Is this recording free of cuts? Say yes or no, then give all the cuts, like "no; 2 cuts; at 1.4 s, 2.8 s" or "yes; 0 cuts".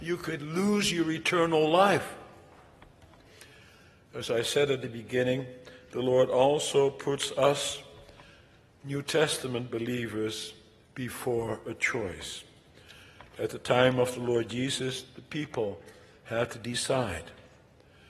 yes; 0 cuts